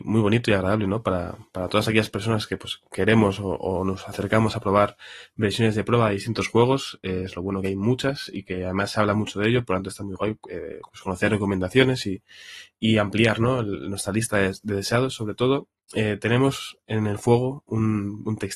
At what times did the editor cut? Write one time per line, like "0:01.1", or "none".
none